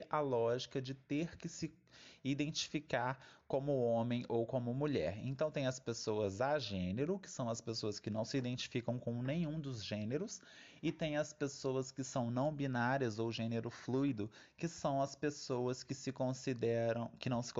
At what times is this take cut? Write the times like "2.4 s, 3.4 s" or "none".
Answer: none